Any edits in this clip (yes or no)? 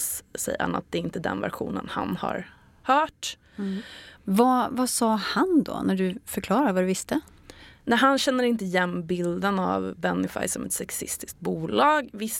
yes